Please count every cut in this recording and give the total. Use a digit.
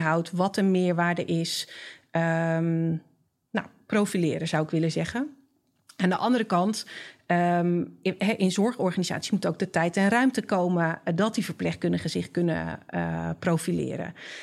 0